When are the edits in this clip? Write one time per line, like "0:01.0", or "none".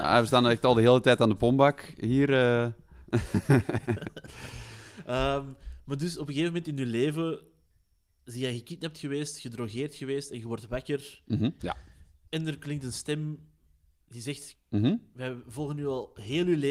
0:11.6
0:14.5